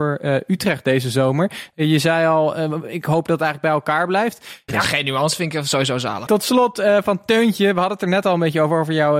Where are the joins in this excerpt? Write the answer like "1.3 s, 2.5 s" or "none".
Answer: 4.7 s, 6.3 s